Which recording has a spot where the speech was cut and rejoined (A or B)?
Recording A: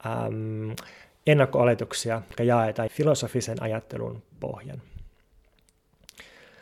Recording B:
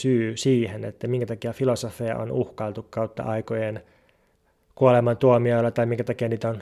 A